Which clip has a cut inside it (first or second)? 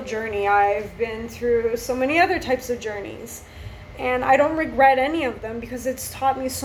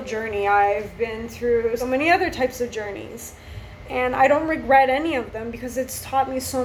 second